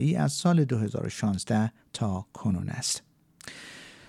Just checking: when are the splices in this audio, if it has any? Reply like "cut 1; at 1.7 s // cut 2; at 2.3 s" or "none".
none

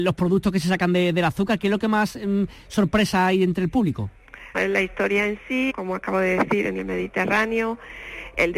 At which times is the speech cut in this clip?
cut 1; at 4.5 s // cut 2; at 5.7 s

